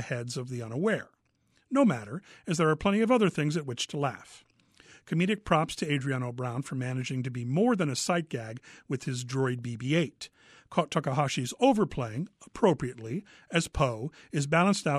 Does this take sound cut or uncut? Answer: uncut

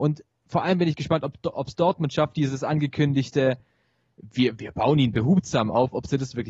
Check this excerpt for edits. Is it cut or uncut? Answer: uncut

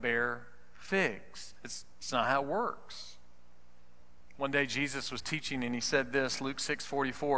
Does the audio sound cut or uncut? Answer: uncut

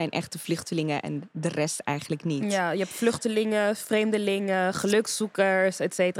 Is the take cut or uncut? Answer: uncut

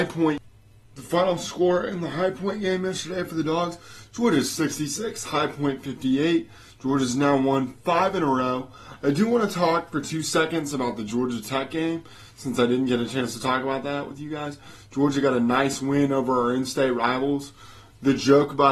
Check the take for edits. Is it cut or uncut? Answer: uncut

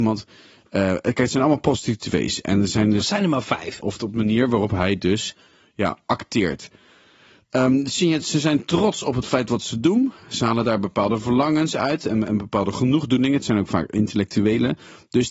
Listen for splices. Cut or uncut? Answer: cut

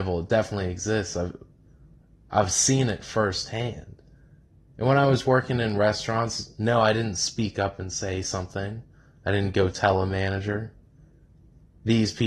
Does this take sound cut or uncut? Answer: uncut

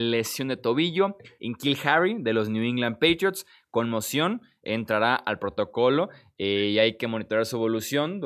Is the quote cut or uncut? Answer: cut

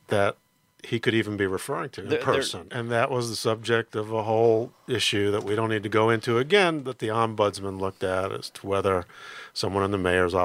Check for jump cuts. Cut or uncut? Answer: cut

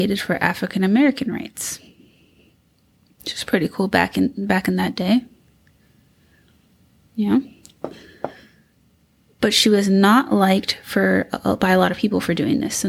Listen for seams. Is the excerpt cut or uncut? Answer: uncut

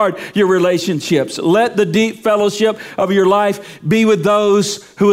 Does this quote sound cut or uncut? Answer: uncut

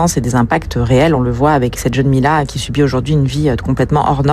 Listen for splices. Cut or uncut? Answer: uncut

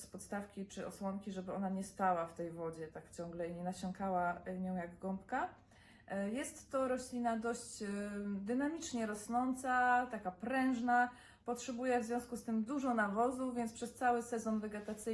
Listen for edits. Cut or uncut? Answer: uncut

